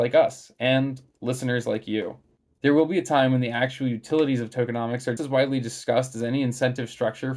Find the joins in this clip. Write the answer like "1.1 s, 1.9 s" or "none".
5.2 s